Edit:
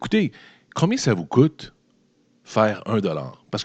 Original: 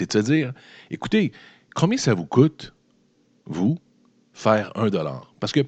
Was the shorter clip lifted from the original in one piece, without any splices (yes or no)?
no